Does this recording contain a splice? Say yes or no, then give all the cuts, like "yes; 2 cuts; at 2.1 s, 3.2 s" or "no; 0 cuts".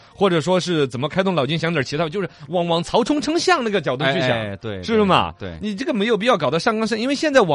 no; 0 cuts